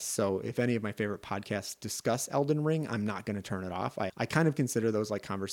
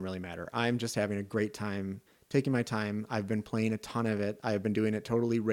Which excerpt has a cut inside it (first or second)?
first